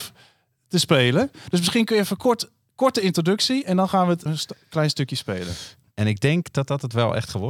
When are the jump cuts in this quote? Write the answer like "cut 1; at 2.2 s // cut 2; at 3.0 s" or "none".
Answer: cut 1; at 4.3 s // cut 2; at 5.9 s